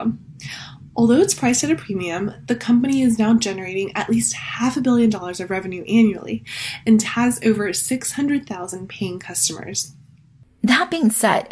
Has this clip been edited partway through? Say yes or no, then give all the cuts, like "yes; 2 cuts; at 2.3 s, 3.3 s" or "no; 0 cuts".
no; 0 cuts